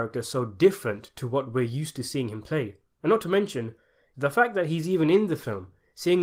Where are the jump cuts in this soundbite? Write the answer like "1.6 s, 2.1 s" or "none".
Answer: 4.1 s